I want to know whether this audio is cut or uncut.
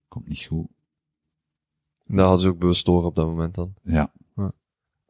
uncut